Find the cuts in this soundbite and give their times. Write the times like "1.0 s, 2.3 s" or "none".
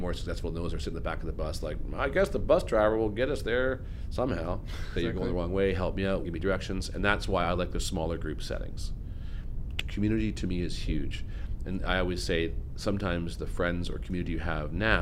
5.0 s, 6.2 s, 9.8 s